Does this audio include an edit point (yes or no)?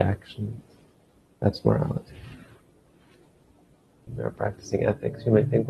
yes